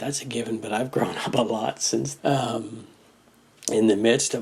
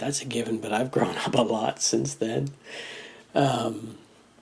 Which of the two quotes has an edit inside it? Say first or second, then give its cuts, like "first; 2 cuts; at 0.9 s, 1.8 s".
first; 1 cut; at 2.2 s